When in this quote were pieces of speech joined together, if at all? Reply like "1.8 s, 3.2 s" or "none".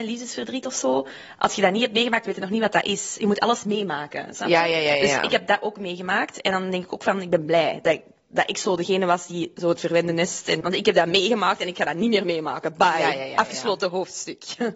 10.6 s